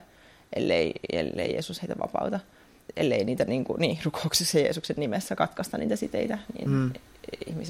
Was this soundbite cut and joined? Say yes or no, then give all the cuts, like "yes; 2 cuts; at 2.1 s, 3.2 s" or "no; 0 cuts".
no; 0 cuts